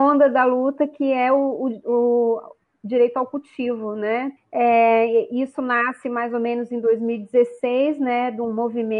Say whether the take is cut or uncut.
cut